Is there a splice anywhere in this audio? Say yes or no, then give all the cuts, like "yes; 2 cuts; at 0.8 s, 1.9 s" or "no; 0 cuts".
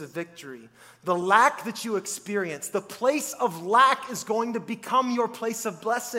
no; 0 cuts